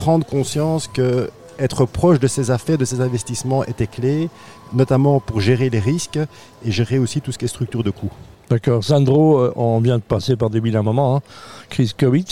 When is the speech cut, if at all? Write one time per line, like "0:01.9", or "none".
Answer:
none